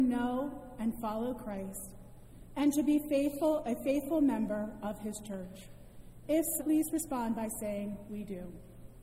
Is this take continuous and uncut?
no; 1 cut; at 6.6 s

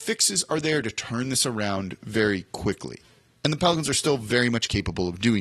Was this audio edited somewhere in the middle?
no; 0 cuts

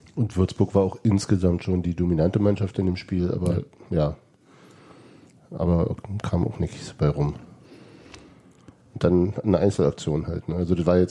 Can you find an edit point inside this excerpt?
no; 0 cuts

